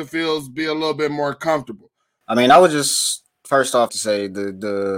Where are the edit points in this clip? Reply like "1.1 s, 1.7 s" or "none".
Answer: 2.2 s, 3.9 s